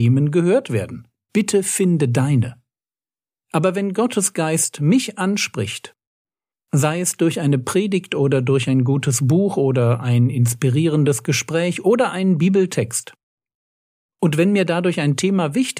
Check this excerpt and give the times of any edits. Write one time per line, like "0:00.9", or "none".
0:01.3